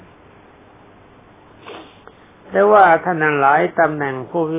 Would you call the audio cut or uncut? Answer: uncut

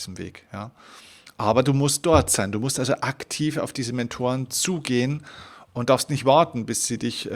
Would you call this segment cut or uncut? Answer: uncut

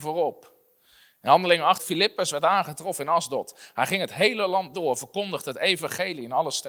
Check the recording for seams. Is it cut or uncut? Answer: cut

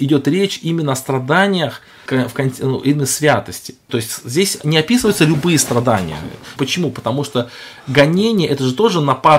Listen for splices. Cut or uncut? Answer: cut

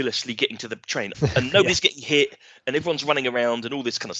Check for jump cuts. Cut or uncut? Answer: cut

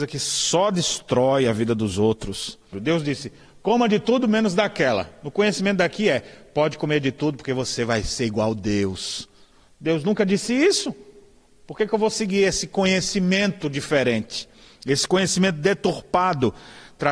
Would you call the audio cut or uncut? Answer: cut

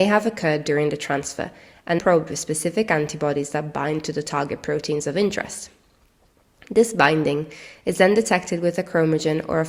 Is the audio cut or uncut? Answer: cut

